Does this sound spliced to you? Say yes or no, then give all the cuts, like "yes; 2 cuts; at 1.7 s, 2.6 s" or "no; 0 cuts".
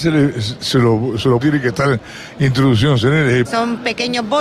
yes; 2 cuts; at 1.4 s, 3.4 s